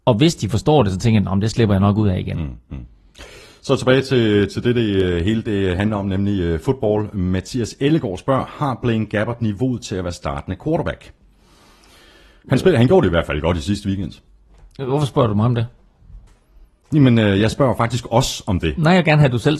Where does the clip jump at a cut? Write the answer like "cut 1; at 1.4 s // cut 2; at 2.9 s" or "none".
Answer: none

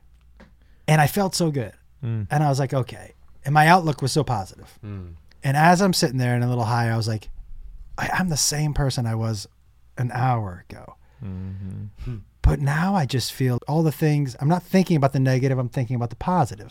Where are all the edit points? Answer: cut 1; at 13.6 s

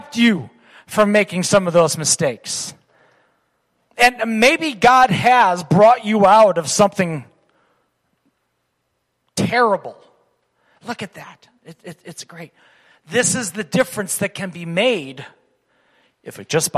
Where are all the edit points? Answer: cut 1; at 10.8 s

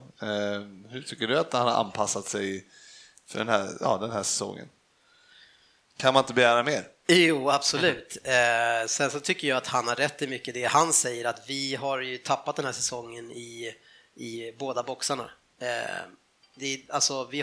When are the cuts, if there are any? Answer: none

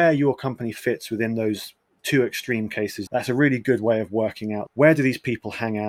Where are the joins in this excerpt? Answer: cut 1; at 3.1 s // cut 2; at 4.7 s

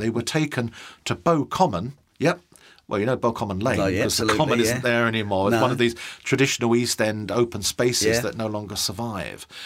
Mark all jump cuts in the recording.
cut 1; at 2.1 s

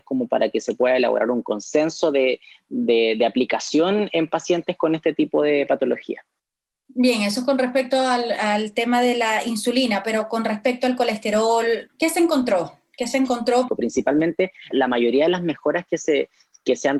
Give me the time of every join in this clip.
cut 1; at 11.9 s // cut 2; at 13.7 s // cut 3; at 14.7 s

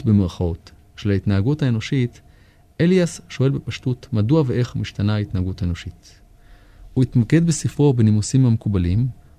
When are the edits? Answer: none

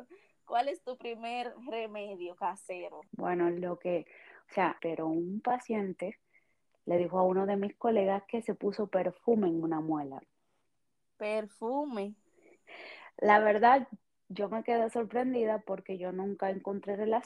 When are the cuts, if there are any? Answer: cut 1; at 3.1 s // cut 2; at 4.8 s

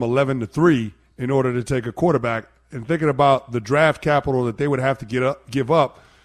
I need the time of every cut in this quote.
none

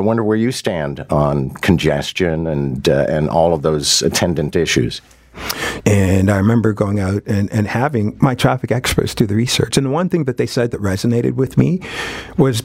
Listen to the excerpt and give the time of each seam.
cut 1; at 5.8 s

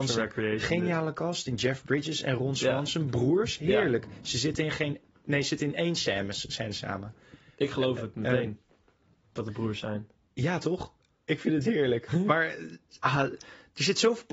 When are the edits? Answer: none

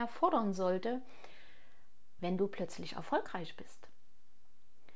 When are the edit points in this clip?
cut 1; at 2.2 s

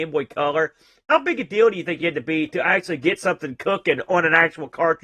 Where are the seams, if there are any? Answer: none

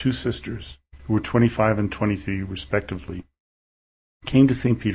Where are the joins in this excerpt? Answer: cut 1; at 1.0 s

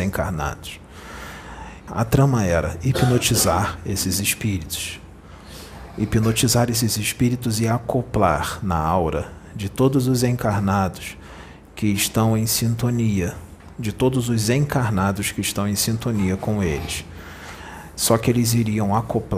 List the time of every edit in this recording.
cut 1; at 1.9 s

